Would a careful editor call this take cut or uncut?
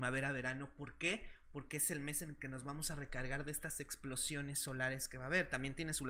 uncut